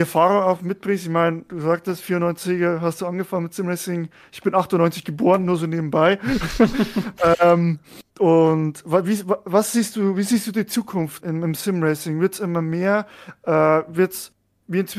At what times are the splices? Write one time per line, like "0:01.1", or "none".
0:08.1
0:11.2

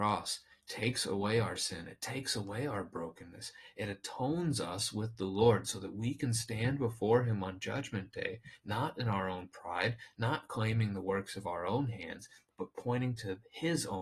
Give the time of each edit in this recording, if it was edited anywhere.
none

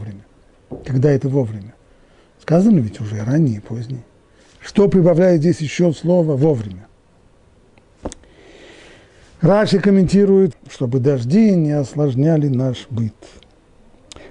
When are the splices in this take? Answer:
0:10.5

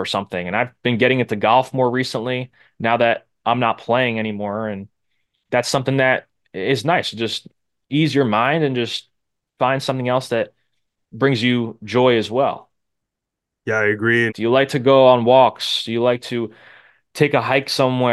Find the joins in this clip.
0:14.3

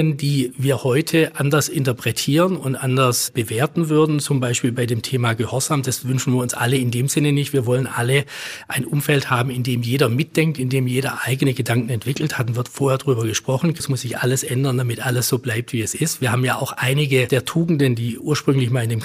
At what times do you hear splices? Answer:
0:13.8

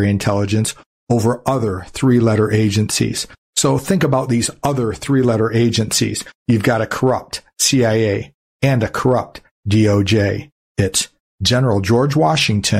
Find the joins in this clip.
0:08.5
0:10.7

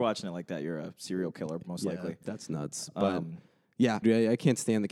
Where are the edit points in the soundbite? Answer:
0:04.0

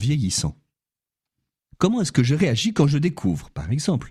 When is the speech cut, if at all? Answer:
0:01.6

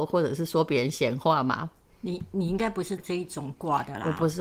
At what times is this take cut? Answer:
0:03.0

